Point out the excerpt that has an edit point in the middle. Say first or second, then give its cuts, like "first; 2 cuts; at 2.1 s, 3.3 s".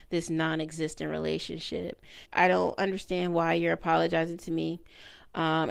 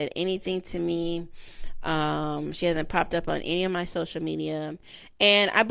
first; 1 cut; at 2.3 s